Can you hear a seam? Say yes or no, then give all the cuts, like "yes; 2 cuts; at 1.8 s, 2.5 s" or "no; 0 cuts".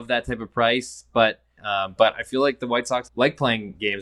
yes; 2 cuts; at 1.6 s, 3.1 s